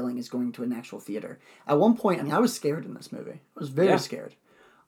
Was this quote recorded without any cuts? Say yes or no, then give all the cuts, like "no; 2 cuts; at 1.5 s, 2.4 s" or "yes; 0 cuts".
yes; 0 cuts